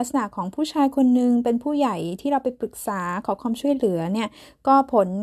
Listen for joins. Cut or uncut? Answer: uncut